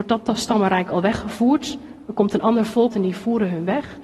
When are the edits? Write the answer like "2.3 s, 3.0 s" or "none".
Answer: 2.9 s